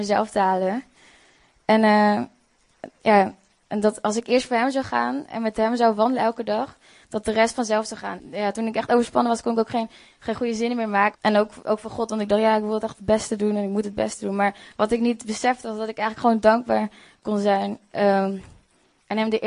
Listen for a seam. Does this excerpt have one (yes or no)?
yes